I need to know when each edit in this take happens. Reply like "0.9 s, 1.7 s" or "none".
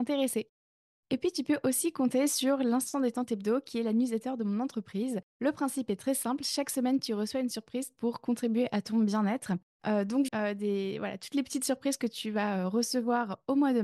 10.3 s